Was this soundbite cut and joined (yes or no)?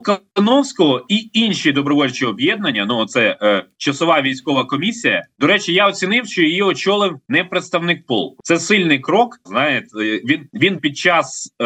yes